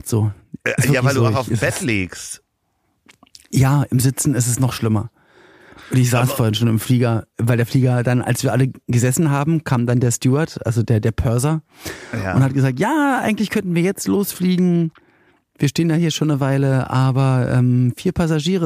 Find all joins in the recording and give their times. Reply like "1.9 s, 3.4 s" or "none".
none